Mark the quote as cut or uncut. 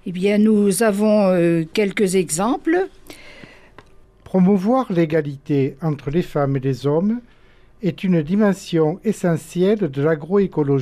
cut